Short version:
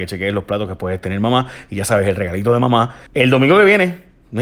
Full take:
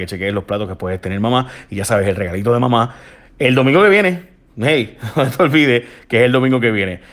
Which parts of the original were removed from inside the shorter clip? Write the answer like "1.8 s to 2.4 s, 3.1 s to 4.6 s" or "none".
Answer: 3.1 s to 3.3 s